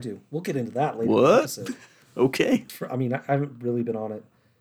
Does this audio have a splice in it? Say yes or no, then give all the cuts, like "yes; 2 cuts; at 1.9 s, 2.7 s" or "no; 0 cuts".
yes; 1 cut; at 2.7 s